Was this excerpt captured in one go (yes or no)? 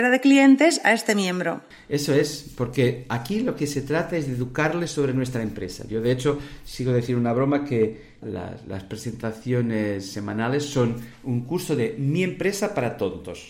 no